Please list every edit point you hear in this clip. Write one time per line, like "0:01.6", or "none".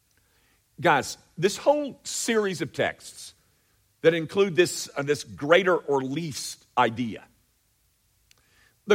none